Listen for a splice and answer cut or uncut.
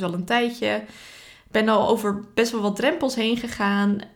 uncut